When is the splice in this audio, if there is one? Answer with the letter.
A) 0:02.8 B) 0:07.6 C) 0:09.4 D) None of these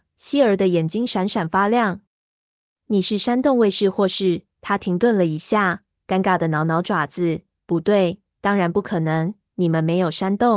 D